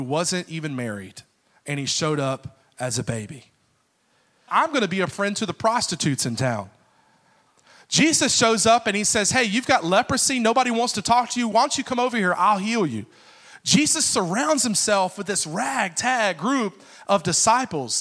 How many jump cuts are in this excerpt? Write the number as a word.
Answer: one